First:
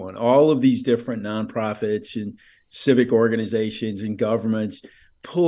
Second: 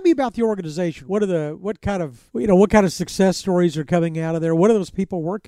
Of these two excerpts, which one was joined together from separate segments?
second; 2 cuts; at 1.0 s, 2.3 s

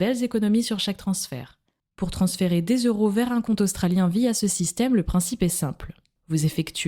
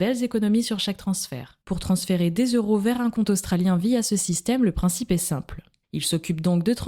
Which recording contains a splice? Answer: second; 2 cuts; at 1.6 s, 5.8 s

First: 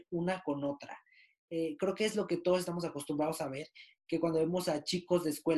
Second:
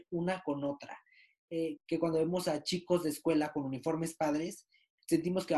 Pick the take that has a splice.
second; 1 cut; at 1.8 s

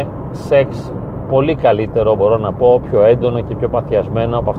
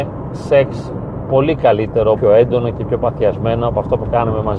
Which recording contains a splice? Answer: second; 1 cut; at 2.2 s

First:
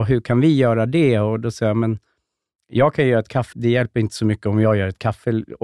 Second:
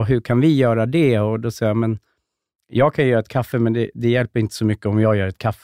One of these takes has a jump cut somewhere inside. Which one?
first; 1 cut; at 3.5 s

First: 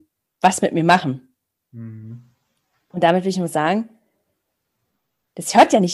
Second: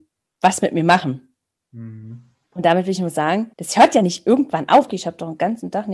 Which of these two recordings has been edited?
second; 3 cuts; at 2.4 s, 3.5 s, 4.9 s

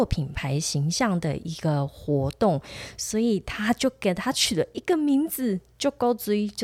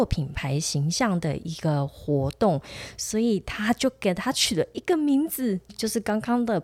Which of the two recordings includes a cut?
second; 1 cut; at 5.7 s

